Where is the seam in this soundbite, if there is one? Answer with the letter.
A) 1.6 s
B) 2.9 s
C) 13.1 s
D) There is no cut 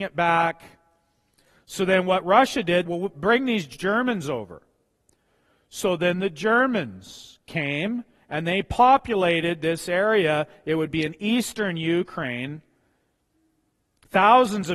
B